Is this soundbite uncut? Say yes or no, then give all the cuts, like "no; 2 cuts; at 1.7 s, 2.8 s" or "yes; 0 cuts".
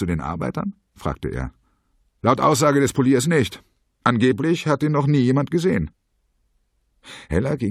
yes; 0 cuts